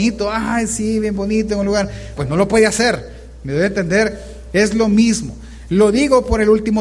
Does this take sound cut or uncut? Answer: cut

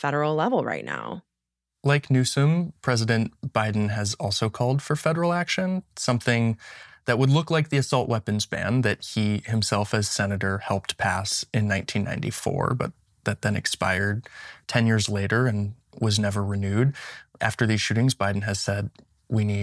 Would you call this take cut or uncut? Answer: uncut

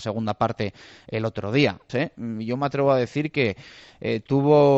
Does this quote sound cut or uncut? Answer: cut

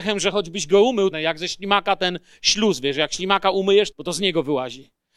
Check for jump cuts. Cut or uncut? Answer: cut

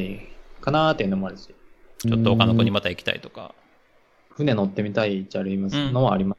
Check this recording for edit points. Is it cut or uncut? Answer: cut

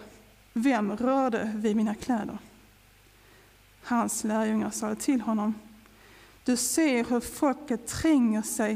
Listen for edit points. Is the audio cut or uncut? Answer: uncut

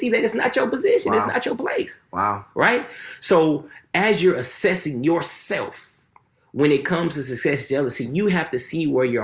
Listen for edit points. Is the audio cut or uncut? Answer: uncut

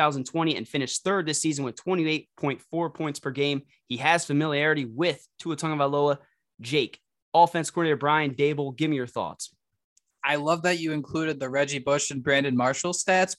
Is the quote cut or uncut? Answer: uncut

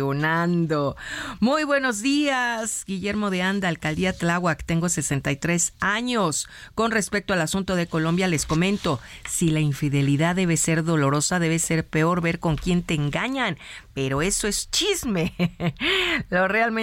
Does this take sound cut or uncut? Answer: uncut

